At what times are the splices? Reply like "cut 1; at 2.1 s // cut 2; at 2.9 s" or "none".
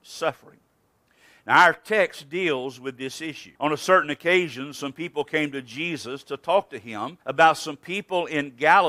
cut 1; at 3.6 s // cut 2; at 7.2 s